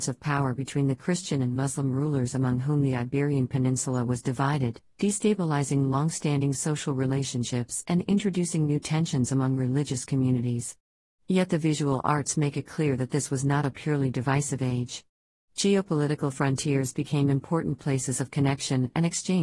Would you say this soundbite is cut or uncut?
uncut